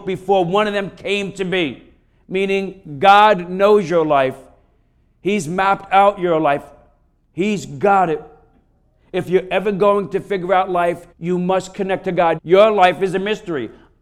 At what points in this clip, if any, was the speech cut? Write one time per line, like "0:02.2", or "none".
0:11.1
0:12.4

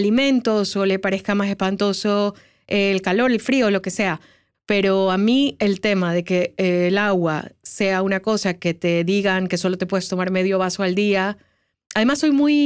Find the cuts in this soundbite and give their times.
0:04.5

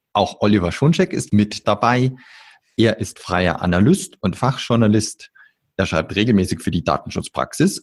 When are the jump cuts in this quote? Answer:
none

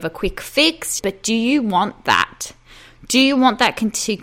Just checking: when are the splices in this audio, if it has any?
0:01.0

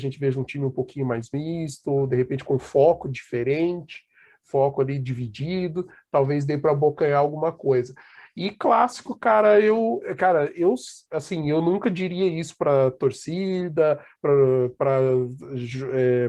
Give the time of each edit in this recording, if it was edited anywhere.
none

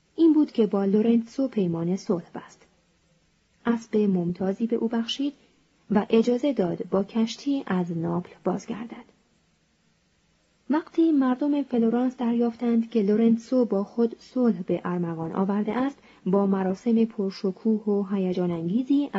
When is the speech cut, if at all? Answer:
none

